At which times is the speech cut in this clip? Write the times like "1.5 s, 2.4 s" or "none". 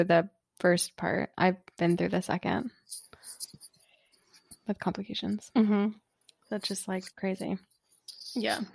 none